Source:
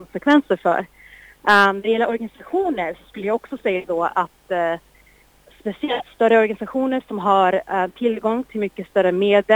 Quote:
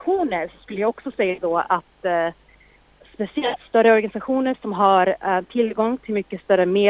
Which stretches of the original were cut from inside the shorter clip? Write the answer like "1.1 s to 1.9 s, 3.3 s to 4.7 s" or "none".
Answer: none